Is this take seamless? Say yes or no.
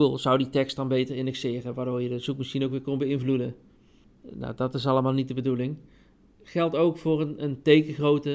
yes